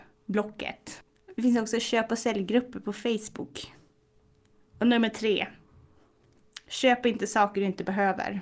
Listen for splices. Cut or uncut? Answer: uncut